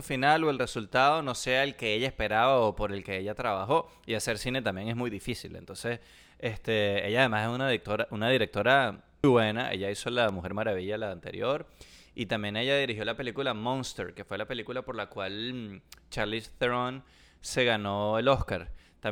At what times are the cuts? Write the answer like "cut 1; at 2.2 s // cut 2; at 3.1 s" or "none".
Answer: cut 1; at 9.2 s